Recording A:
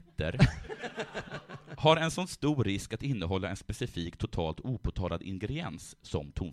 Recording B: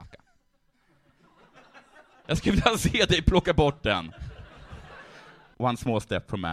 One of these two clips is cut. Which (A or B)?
B